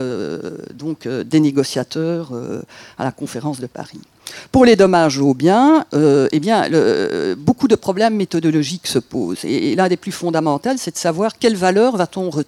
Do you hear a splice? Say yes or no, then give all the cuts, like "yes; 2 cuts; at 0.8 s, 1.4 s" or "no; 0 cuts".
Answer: no; 0 cuts